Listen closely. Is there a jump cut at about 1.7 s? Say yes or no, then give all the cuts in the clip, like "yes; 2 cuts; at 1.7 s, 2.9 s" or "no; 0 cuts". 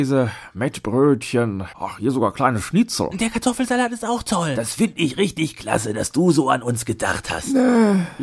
yes; 1 cut; at 1.7 s